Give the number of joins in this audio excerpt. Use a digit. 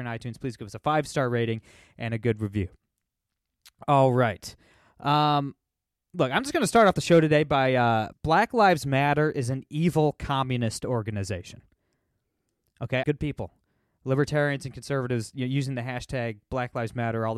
2